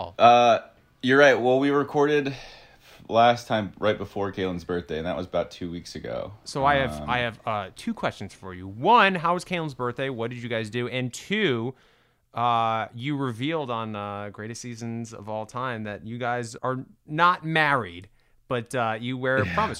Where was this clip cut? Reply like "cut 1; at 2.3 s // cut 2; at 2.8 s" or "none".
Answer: cut 1; at 16.6 s